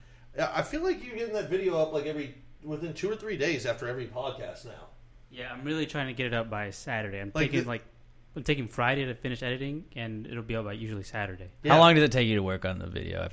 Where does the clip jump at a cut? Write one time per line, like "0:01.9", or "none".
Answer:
none